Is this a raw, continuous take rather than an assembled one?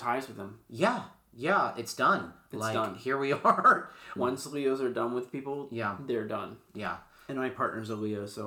no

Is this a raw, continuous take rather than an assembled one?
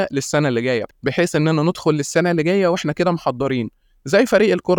yes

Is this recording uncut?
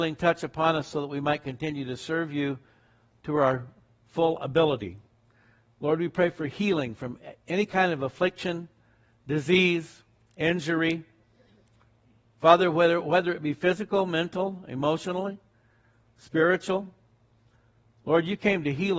yes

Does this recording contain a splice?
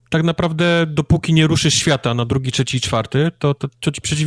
no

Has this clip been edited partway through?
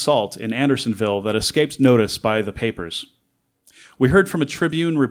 no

